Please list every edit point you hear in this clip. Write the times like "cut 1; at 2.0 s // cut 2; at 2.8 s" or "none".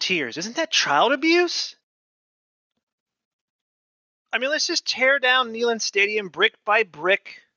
none